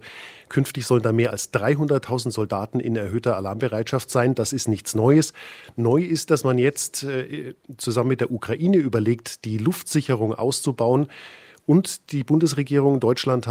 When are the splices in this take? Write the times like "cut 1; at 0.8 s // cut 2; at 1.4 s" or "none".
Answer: none

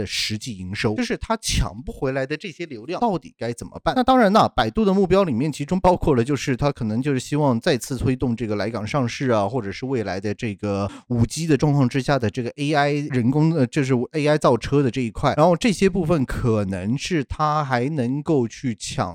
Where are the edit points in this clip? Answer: cut 1; at 1.0 s

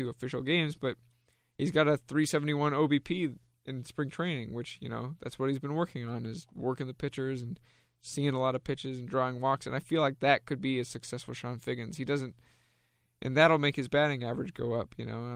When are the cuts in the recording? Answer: none

